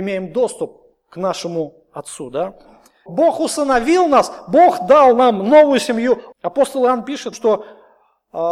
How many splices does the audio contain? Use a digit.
3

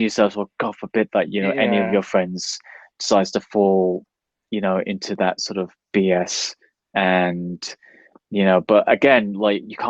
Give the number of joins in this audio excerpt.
0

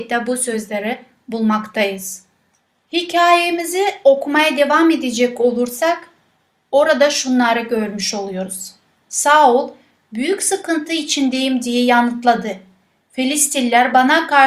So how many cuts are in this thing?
1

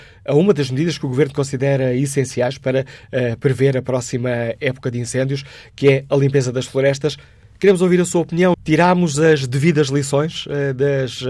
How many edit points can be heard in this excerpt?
1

